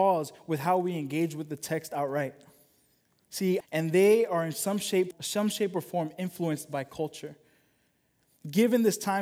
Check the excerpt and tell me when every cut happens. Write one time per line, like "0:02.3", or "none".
0:03.6
0:05.1